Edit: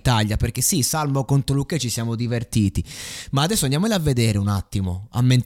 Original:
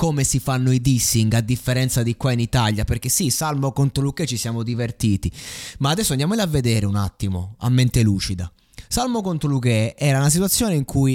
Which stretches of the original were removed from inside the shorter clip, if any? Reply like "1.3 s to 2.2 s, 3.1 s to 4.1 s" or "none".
none